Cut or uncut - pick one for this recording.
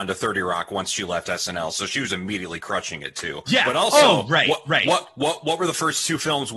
uncut